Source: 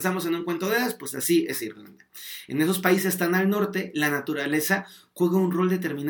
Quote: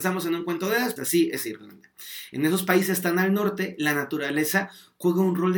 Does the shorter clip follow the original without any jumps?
no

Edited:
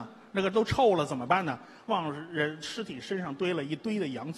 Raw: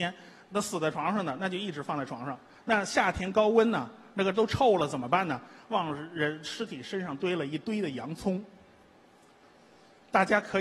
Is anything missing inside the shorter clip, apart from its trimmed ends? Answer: no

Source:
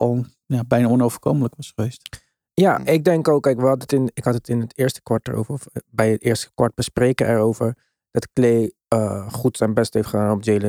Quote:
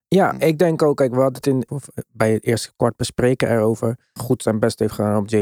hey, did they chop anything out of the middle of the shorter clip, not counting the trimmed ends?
yes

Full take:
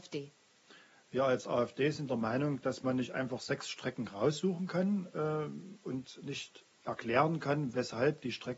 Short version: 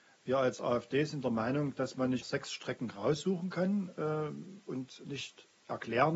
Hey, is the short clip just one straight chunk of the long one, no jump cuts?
no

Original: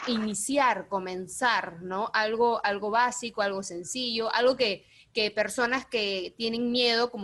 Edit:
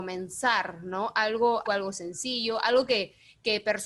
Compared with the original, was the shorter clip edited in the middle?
yes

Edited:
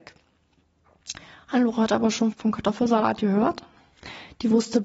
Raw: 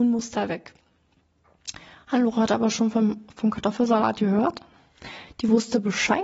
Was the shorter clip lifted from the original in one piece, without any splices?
no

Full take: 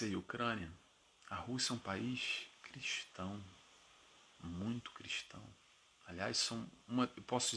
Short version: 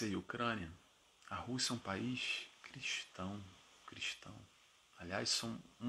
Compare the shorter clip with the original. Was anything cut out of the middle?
yes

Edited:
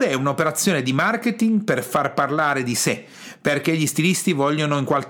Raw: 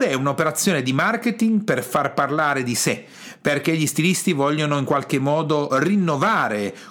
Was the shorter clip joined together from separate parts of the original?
no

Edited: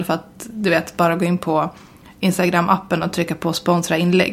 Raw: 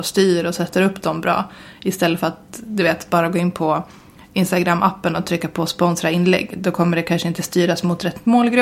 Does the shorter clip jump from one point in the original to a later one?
no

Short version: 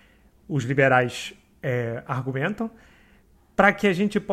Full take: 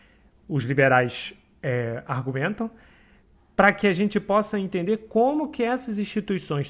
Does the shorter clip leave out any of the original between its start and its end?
no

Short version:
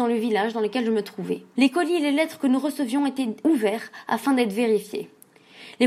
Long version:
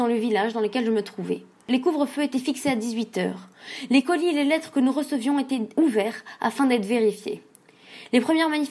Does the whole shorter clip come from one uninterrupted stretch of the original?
no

